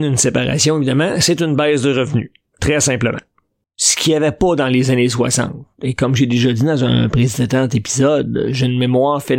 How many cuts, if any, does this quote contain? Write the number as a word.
one